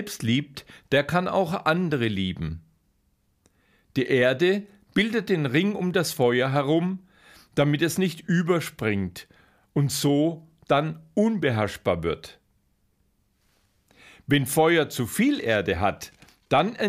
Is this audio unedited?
yes; 0 cuts

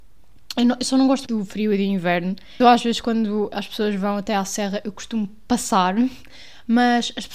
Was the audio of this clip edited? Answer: yes; 2 cuts; at 1.3 s, 2.6 s

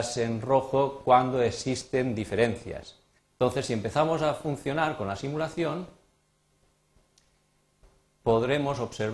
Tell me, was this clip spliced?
yes; 1 cut; at 3.2 s

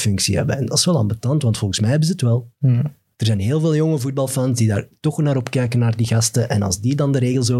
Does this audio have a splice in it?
no; 0 cuts

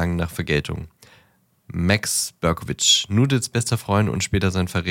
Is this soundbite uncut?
yes; 0 cuts

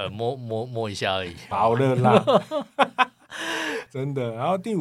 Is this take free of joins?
no; 2 cuts; at 1.5 s, 3.9 s

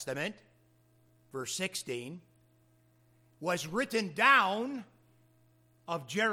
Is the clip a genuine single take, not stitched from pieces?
yes; 0 cuts

